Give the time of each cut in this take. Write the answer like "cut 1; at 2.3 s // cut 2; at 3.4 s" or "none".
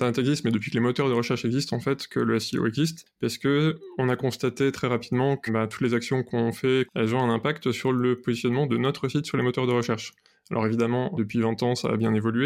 cut 1; at 5.5 s // cut 2; at 6.9 s // cut 3; at 11.1 s